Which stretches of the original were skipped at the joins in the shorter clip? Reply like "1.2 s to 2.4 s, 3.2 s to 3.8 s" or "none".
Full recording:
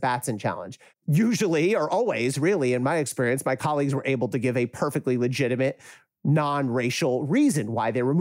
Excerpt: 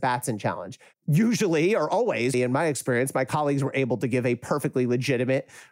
2.3 s to 2.6 s